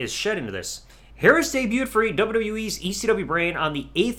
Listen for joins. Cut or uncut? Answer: cut